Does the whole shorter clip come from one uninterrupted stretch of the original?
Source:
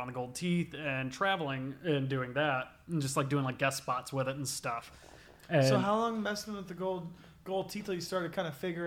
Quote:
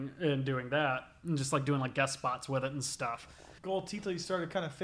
no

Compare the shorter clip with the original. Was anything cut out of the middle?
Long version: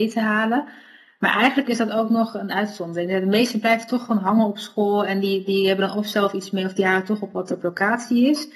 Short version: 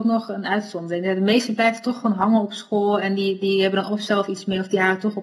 no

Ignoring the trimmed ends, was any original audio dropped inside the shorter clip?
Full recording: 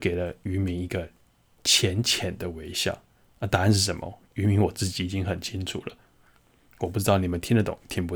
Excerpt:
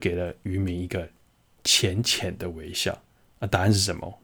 no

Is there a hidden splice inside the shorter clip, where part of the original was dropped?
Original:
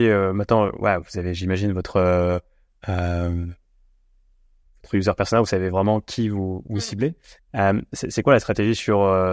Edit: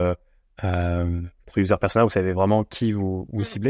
yes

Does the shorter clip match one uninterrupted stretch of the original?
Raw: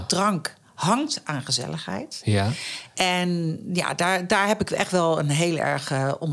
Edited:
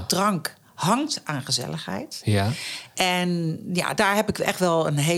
no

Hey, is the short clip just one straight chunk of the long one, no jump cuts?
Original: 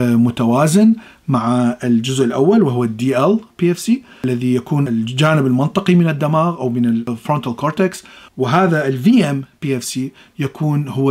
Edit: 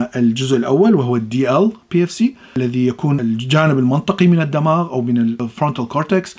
yes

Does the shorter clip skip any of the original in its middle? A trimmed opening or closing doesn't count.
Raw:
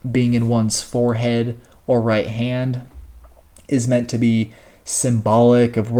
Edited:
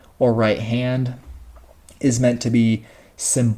no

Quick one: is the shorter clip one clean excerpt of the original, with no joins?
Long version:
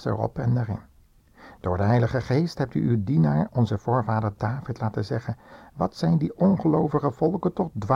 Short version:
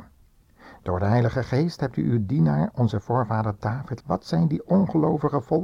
no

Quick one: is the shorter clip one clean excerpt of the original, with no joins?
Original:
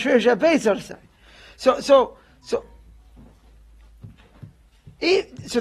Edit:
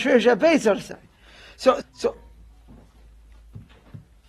no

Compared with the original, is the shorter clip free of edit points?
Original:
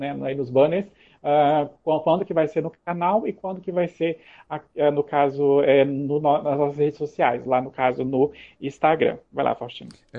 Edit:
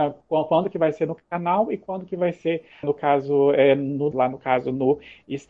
no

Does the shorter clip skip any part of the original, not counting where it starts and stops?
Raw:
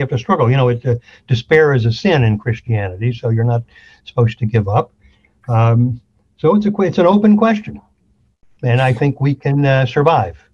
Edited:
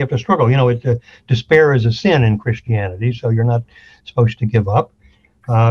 no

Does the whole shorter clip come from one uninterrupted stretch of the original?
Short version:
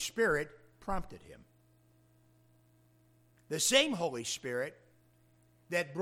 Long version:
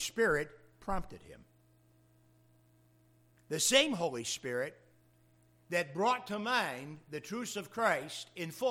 yes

